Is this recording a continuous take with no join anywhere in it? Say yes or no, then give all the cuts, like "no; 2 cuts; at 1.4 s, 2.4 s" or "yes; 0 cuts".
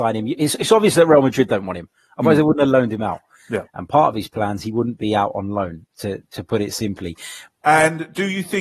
no; 2 cuts; at 3.6 s, 7.5 s